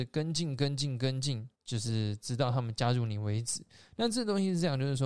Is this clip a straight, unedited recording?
no; 1 cut; at 1.6 s

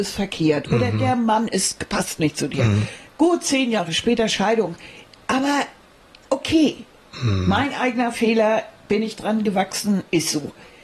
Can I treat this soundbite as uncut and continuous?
yes; 0 cuts

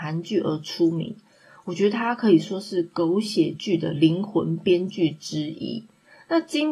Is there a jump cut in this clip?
no; 0 cuts

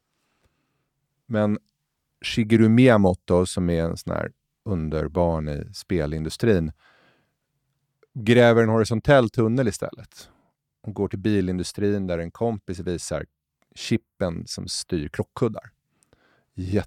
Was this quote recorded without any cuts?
yes; 0 cuts

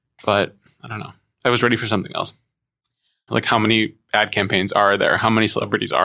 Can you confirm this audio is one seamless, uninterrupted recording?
no; 1 cut; at 3.3 s

